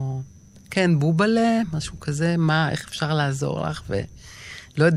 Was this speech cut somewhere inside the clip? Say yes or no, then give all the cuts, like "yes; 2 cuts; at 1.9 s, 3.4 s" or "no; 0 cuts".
no; 0 cuts